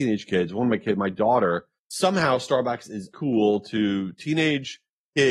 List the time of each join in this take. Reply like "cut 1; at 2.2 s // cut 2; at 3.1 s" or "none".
cut 1; at 1.8 s // cut 2; at 3.1 s